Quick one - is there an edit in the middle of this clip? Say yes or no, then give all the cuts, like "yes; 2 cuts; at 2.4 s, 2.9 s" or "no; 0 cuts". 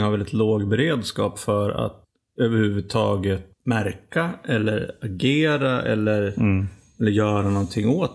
no; 0 cuts